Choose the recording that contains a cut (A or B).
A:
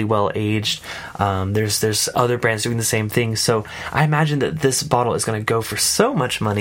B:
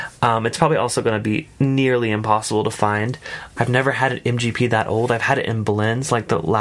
B